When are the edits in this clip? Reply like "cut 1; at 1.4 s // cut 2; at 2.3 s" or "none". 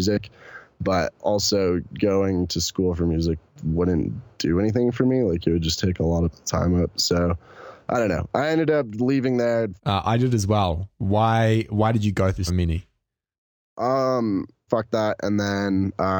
cut 1; at 9.8 s // cut 2; at 12.5 s // cut 3; at 14.7 s